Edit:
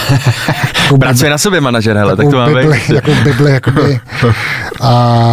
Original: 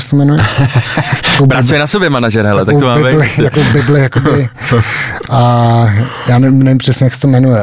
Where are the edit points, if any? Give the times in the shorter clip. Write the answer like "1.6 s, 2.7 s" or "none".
none